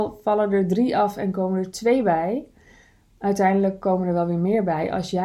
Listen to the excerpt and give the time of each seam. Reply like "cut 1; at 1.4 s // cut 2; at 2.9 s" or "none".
none